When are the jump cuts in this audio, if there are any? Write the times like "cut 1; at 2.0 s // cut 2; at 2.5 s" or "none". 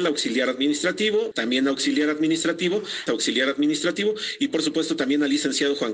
cut 1; at 1.3 s // cut 2; at 3.1 s